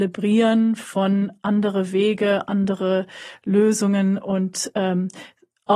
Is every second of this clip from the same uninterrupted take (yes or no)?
yes